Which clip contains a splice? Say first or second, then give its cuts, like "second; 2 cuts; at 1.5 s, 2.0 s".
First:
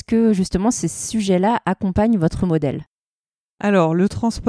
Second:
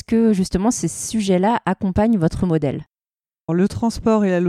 second; 1 cut; at 3.5 s